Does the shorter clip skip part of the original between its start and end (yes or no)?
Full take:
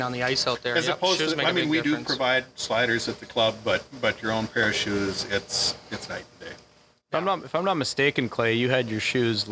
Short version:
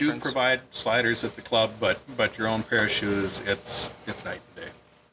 no